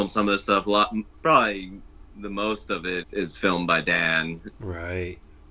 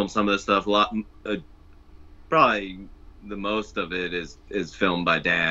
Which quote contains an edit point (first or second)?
first